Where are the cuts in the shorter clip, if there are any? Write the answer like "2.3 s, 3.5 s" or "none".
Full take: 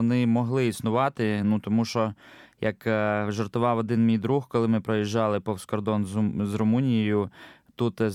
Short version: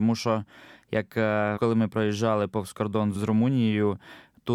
1.6 s, 3.1 s